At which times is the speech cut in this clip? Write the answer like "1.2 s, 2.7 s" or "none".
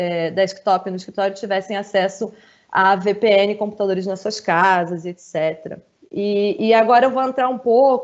6.0 s